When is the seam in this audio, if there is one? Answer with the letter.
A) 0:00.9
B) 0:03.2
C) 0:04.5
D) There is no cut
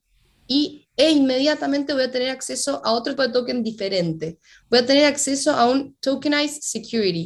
B